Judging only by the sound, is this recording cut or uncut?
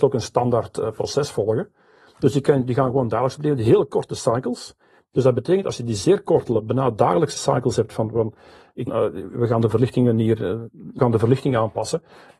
cut